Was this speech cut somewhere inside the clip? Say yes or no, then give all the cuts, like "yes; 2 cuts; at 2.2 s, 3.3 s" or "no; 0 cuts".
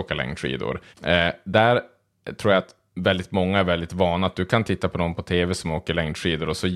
yes; 1 cut; at 0.9 s